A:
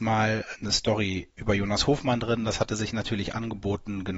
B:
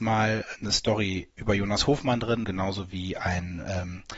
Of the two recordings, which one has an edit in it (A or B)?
B